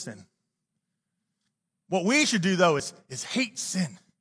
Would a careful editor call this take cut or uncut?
uncut